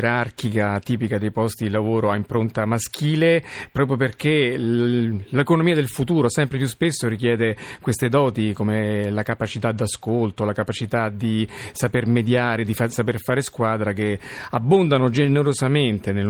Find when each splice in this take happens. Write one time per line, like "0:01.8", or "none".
none

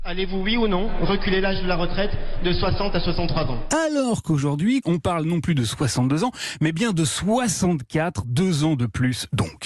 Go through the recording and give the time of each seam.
0:04.8

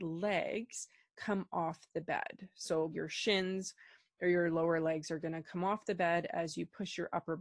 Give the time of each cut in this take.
0:02.9

